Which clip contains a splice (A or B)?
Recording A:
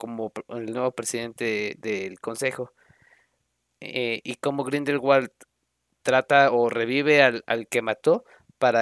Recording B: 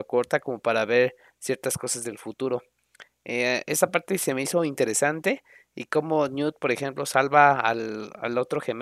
A